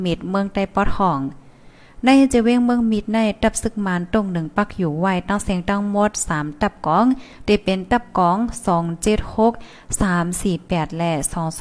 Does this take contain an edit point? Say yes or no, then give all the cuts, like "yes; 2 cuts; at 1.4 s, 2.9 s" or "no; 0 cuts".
no; 0 cuts